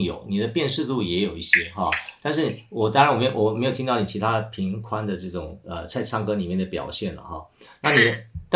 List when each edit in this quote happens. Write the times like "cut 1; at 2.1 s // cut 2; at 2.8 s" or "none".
none